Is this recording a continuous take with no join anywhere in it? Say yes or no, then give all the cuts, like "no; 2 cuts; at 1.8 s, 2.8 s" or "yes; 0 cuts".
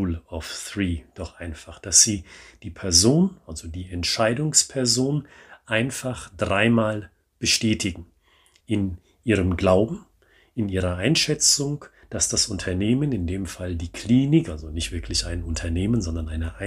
yes; 0 cuts